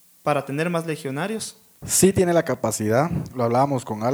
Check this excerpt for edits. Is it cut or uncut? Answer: cut